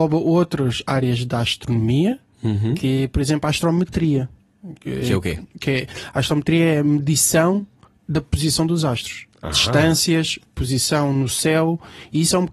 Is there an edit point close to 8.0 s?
no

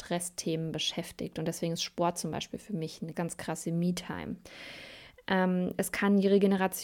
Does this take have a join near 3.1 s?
yes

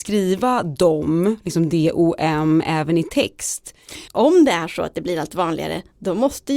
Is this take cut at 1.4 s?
no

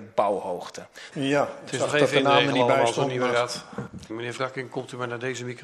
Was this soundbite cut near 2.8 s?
no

